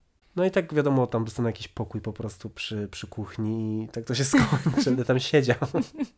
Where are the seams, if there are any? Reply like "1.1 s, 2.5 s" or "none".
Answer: none